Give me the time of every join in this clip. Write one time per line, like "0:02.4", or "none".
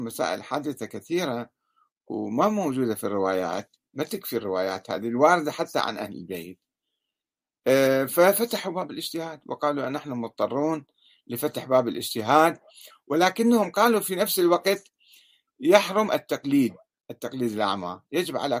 none